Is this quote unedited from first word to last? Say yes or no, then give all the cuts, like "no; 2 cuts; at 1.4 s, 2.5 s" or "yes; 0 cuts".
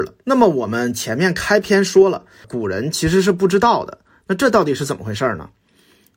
no; 1 cut; at 2.4 s